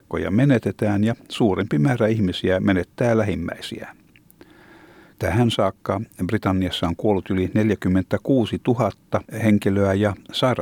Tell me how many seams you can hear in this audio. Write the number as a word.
one